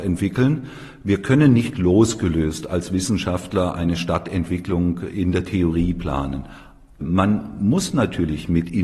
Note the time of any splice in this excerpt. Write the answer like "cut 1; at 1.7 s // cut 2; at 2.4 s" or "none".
cut 1; at 7.0 s

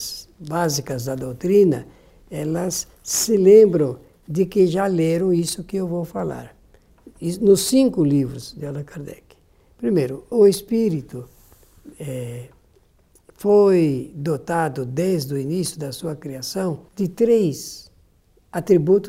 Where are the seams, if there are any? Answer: cut 1; at 10.3 s // cut 2; at 16.9 s

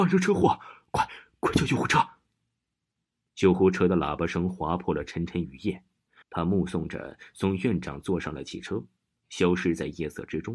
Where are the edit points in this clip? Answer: cut 1; at 6.2 s

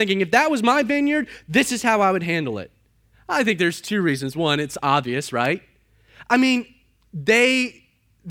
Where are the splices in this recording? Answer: cut 1; at 3.1 s

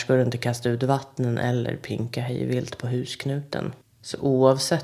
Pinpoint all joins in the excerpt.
cut 1; at 3.8 s

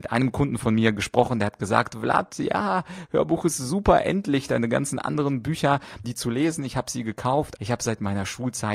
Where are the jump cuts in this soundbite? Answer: cut 1; at 6.0 s // cut 2; at 7.6 s

